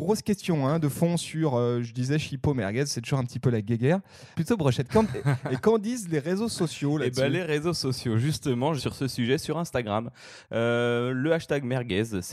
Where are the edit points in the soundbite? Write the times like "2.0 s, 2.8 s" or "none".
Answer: 4.3 s, 8.8 s